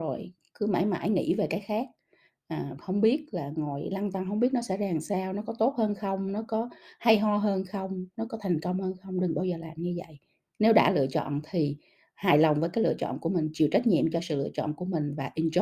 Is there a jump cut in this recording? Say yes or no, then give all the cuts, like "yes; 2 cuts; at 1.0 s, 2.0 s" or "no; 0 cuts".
yes; 1 cut; at 2.8 s